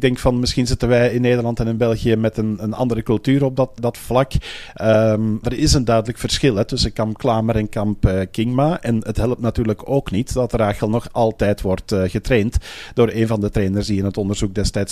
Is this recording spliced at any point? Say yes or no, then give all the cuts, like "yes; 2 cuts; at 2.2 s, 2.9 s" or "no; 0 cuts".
yes; 2 cuts; at 3.8 s, 5.4 s